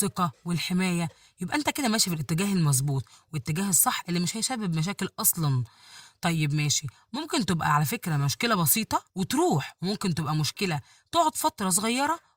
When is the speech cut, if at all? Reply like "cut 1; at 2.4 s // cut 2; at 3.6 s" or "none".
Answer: cut 1; at 9.1 s